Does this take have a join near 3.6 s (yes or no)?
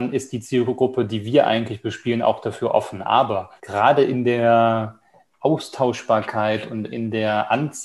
yes